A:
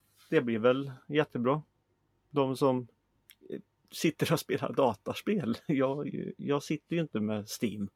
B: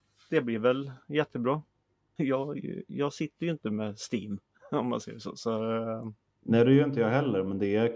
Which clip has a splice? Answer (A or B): B